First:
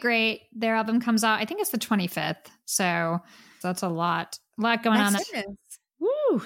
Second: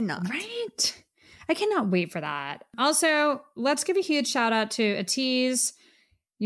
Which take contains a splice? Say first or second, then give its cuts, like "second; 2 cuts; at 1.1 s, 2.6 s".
first; 2 cuts; at 3.6 s, 5.2 s